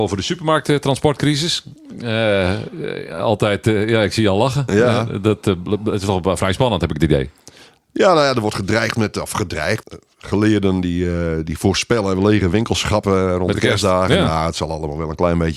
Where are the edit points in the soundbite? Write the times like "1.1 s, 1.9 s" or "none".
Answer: 9.8 s